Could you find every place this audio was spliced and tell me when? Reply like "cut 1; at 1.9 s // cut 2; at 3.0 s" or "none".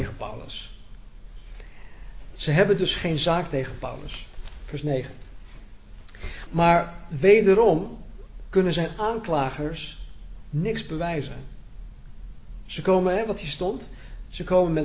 cut 1; at 2.4 s // cut 2; at 6.5 s

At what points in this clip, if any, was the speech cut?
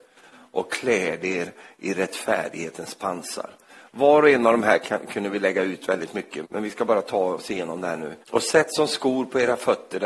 cut 1; at 6.4 s // cut 2; at 8.2 s

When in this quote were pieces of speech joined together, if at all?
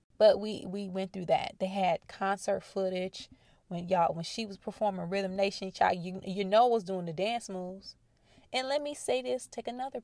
none

